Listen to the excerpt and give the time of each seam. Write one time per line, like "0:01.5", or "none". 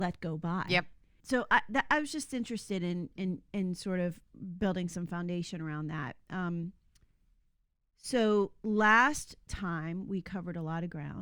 none